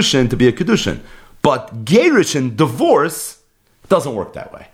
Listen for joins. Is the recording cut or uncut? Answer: uncut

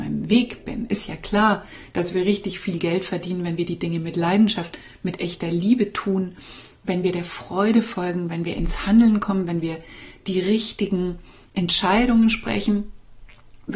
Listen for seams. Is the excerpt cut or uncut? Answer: uncut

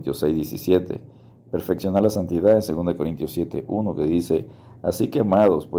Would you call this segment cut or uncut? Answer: uncut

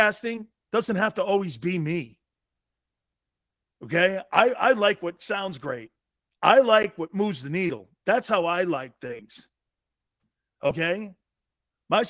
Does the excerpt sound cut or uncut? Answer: uncut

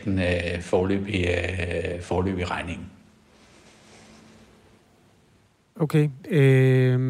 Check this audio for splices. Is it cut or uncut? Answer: uncut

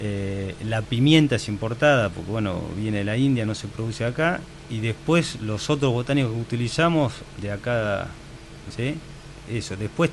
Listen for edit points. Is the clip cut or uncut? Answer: cut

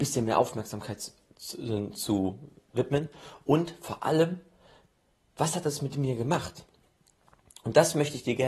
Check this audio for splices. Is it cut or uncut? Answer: uncut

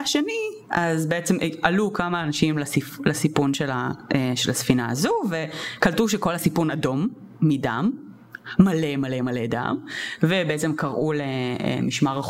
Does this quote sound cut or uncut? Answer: uncut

